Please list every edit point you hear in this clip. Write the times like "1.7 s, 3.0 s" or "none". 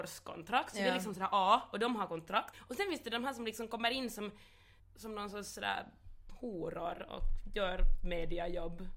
2.5 s, 4.8 s